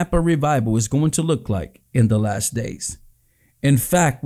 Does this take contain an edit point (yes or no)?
no